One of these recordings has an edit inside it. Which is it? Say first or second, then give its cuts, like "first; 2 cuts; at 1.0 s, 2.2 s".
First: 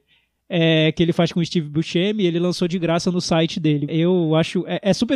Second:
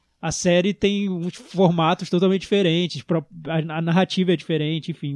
first; 1 cut; at 3.9 s